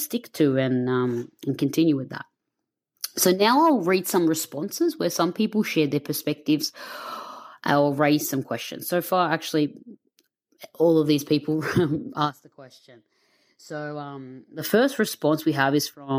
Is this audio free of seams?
yes; 0 cuts

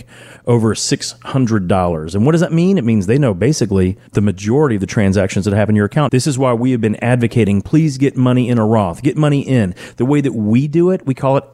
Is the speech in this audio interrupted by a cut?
yes; 2 cuts; at 4.1 s, 6.1 s

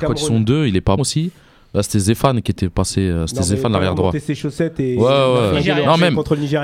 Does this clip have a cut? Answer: yes; 1 cut; at 1.0 s

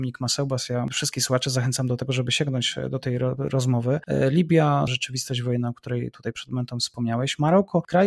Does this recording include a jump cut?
yes; 1 cut; at 4.9 s

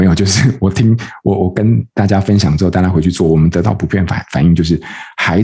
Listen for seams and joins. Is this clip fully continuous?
yes; 0 cuts

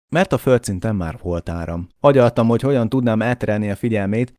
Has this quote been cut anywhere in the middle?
yes; 1 cut; at 1.9 s

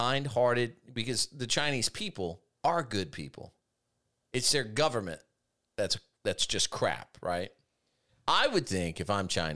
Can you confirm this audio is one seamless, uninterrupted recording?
no; 1 cut; at 8.1 s

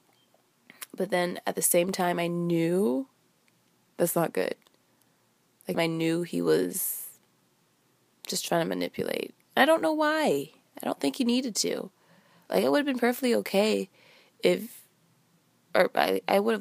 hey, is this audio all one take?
no; 1 cut; at 5.7 s

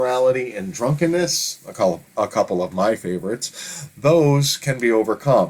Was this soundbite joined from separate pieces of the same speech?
no; 0 cuts

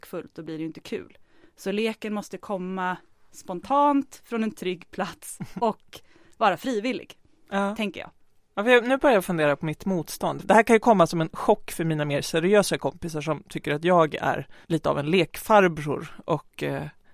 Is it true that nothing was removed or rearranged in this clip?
no; 2 cuts; at 10.4 s, 14.6 s

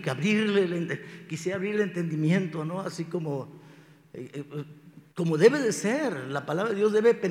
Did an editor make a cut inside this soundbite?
yes; 1 cut; at 5.1 s

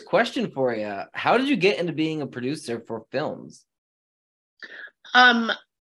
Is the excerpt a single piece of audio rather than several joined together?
yes; 0 cuts

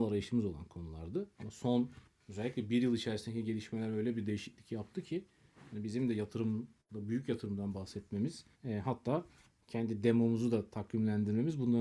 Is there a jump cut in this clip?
yes; 1 cut; at 8.5 s

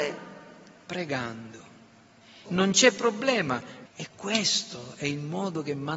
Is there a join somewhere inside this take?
yes; 2 cuts; at 2.4 s, 3.9 s

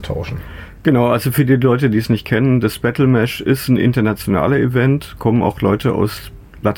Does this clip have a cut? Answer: no; 0 cuts

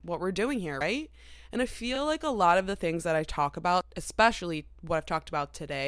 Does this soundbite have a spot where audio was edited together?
no; 0 cuts

